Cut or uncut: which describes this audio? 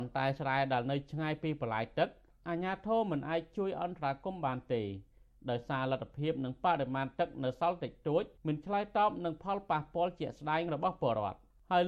cut